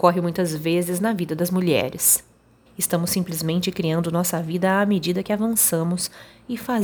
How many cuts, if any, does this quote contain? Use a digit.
1